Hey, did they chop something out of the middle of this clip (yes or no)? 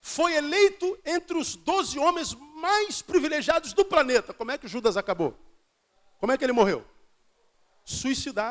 no